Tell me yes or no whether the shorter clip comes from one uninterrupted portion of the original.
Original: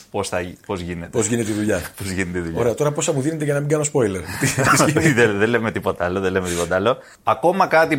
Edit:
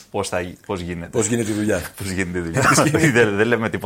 no